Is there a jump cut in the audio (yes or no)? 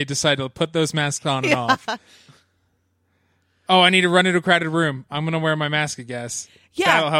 no